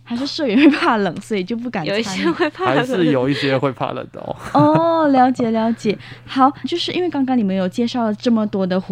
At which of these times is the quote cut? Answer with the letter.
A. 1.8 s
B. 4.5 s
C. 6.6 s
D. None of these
C